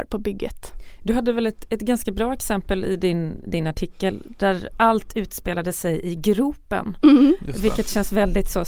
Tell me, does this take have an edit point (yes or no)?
no